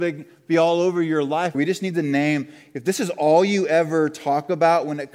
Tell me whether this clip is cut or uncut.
cut